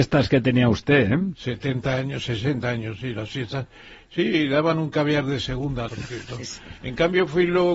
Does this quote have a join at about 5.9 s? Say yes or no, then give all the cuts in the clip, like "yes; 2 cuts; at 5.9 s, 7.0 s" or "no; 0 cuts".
yes; 1 cut; at 5.9 s